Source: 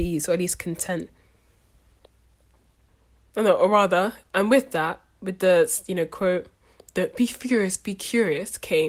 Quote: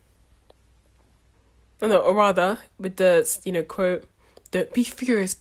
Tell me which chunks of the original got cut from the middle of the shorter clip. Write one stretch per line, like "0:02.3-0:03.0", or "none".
0:04.3-0:05.2

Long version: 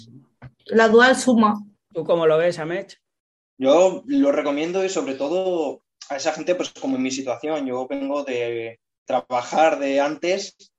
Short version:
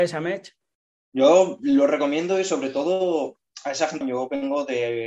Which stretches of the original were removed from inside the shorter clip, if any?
0:06.5-0:07.6

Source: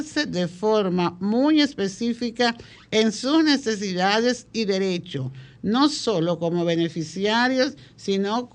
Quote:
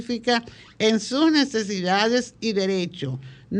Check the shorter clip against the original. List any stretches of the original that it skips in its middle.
none

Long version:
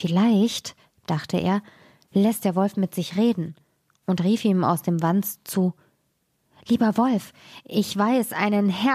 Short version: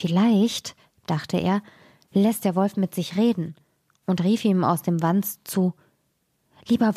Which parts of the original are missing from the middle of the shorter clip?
none

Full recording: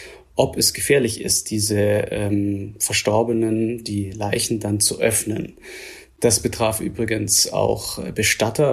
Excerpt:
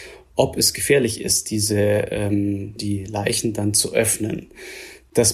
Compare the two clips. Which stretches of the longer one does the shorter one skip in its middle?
0:02.8-0:03.8

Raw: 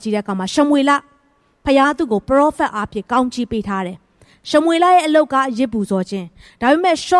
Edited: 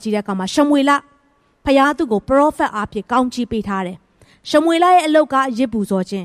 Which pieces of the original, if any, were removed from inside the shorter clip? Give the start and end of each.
none

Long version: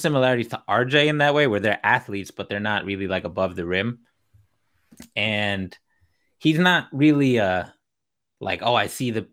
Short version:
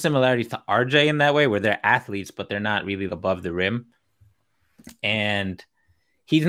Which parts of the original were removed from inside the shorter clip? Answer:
0:03.1-0:03.2

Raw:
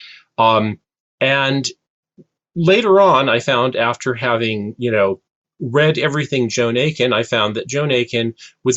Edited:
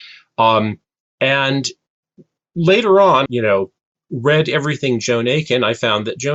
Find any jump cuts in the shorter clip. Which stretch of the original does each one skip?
0:03.3-0:04.7

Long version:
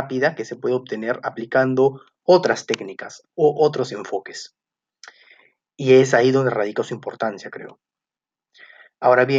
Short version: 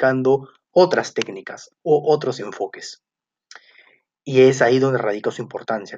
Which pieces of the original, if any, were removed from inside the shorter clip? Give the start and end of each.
none

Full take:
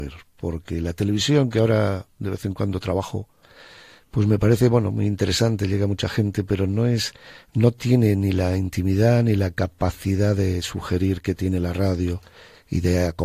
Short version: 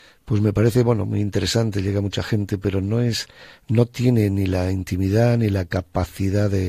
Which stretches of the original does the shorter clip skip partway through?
none

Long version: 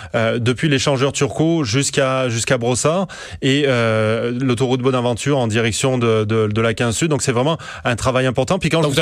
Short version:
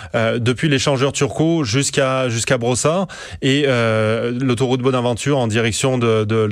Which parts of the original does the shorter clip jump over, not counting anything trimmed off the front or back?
none

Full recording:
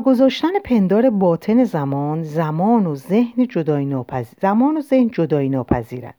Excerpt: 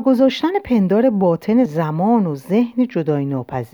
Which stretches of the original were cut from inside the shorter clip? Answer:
0:01.7-0:02.3

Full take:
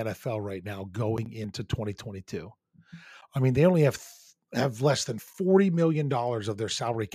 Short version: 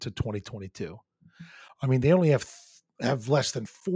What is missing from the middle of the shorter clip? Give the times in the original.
none

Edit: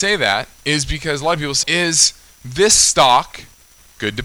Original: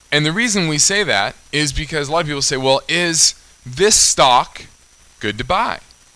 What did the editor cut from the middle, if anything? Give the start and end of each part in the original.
0:02.5-0:02.8

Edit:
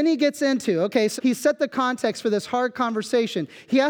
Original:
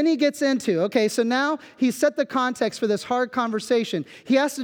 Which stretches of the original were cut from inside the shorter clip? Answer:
0:01.2-0:01.7

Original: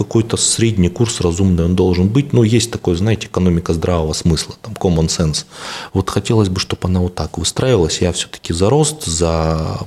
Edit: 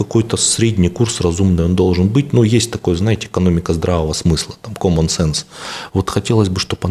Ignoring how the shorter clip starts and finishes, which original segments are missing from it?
none

